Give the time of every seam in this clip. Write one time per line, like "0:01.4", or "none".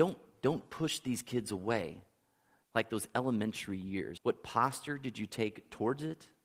0:02.6
0:04.2